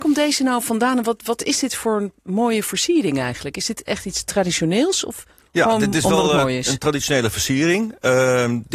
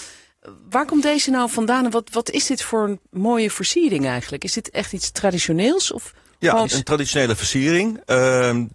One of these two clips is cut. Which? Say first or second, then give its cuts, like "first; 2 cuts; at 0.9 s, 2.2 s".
second; 1 cut; at 6.6 s